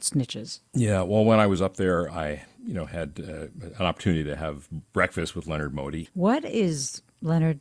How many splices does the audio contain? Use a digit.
2